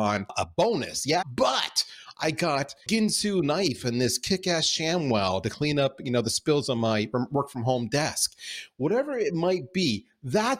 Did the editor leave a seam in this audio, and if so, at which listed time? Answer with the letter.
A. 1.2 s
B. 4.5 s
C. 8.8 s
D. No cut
A